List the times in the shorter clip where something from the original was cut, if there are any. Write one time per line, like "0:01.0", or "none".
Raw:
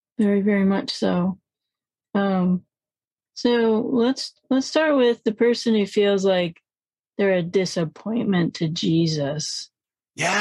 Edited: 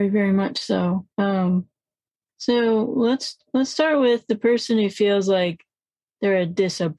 0:01.1